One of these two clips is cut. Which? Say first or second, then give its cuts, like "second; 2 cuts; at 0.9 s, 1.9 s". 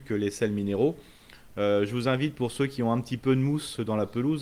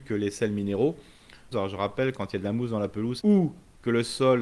second; 2 cuts; at 1.5 s, 3.2 s